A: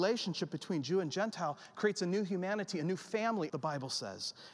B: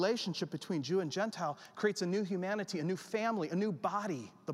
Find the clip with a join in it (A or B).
A